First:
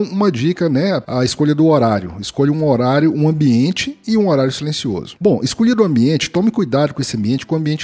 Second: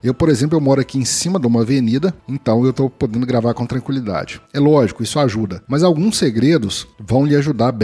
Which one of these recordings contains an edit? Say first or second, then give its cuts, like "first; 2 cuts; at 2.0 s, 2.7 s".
second; 2 cuts; at 2.2 s, 4.5 s